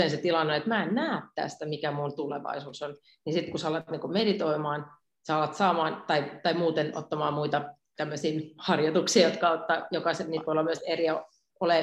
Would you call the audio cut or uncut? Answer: uncut